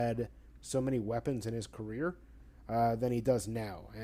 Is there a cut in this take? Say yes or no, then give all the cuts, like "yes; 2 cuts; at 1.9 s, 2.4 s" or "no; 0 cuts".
no; 0 cuts